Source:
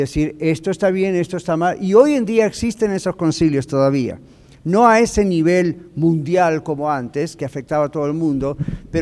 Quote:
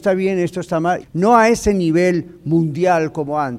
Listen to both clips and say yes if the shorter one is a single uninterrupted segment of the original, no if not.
no